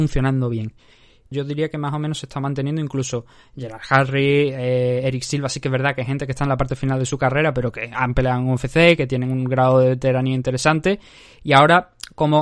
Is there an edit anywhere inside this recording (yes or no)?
yes